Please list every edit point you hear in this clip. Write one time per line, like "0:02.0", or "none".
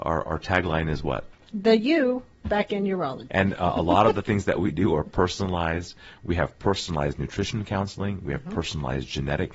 0:01.3
0:03.3